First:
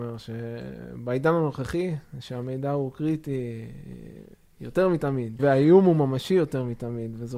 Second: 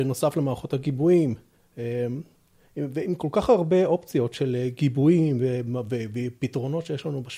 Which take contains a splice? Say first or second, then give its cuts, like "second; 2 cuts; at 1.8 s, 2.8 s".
first; 1 cut; at 5.4 s